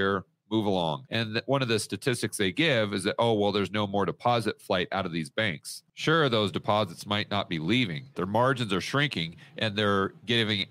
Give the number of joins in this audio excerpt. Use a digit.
2